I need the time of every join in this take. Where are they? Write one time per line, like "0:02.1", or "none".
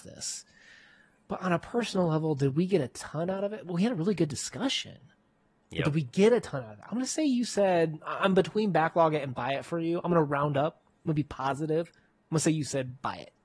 none